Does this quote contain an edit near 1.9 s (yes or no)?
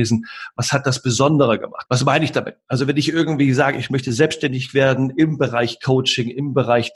yes